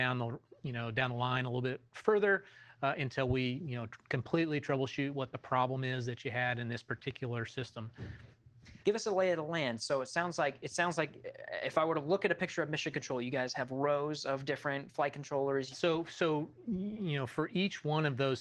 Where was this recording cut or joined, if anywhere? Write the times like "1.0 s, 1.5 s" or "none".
8.8 s, 15.7 s